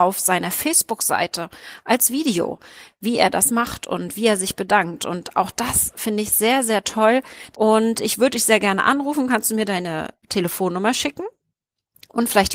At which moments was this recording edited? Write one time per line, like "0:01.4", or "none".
0:07.5